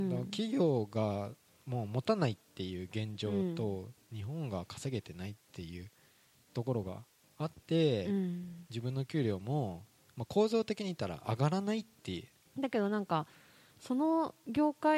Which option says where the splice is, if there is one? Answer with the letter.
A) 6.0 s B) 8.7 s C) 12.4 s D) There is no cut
C